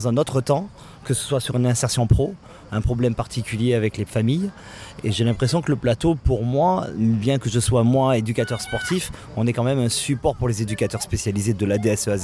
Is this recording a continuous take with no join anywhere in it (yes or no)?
yes